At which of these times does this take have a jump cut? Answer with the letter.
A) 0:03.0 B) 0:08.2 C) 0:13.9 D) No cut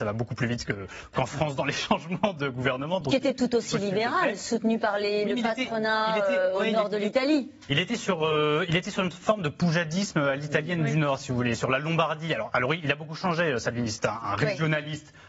D